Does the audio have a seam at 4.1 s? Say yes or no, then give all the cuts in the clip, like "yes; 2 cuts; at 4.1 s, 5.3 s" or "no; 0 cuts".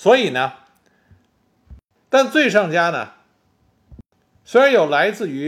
no; 1 cut; at 2.0 s